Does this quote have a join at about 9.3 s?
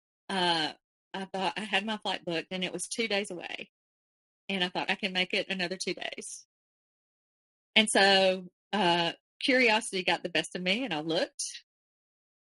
no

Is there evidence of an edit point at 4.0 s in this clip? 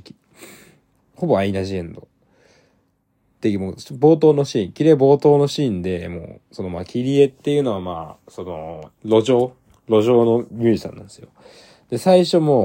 no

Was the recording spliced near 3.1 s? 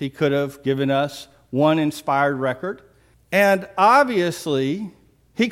yes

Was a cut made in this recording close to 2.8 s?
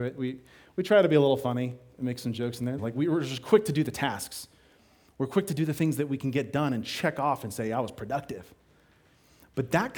yes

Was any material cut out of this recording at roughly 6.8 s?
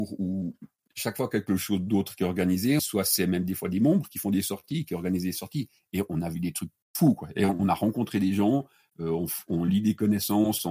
yes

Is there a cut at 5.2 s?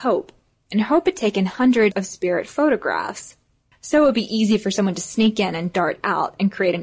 no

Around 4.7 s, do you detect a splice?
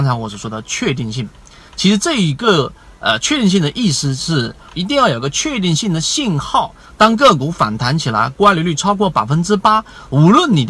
yes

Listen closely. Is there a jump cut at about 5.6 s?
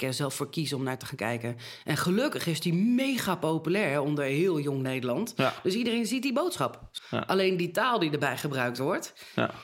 no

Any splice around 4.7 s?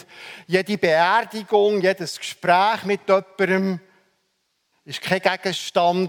yes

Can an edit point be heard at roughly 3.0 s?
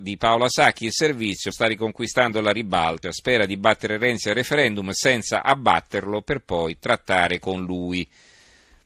yes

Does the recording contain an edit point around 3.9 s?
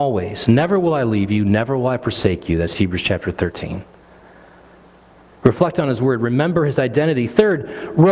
no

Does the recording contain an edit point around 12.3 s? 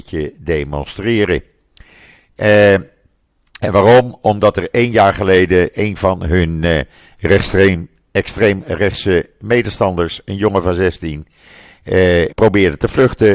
yes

